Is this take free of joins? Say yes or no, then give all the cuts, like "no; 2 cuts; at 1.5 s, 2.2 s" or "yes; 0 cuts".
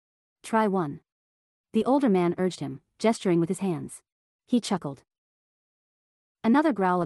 no; 1 cut; at 4.3 s